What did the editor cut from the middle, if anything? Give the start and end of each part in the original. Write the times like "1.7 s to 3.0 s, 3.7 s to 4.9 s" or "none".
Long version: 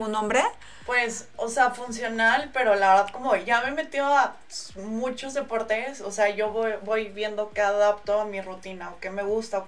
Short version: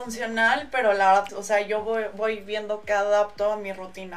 3.1 s to 6.0 s